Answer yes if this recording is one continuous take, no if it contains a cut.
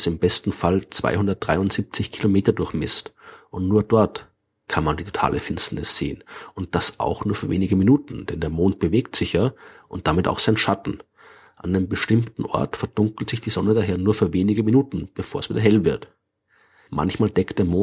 no